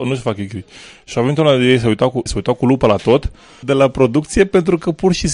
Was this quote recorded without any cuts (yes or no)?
no